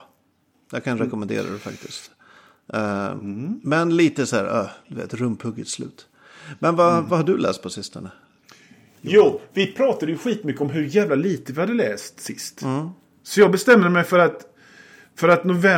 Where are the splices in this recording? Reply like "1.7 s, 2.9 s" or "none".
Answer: none